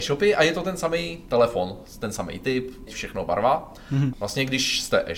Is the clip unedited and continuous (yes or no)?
no